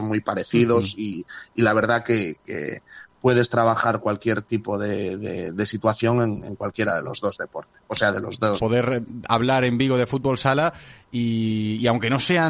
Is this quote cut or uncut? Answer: cut